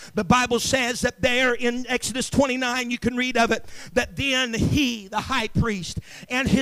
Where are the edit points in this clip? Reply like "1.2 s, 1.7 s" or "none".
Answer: none